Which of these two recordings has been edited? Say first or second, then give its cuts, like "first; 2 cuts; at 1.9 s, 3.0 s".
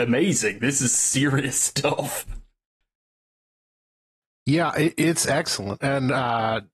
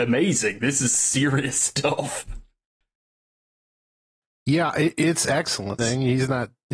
second; 1 cut; at 5.8 s